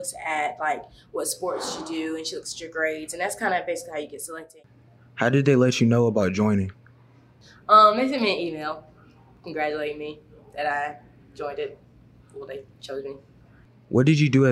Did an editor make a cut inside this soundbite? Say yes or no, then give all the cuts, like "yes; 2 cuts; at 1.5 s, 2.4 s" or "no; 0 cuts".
no; 0 cuts